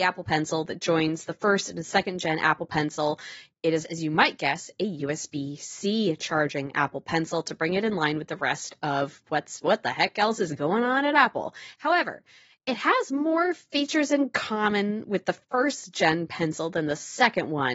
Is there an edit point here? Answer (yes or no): yes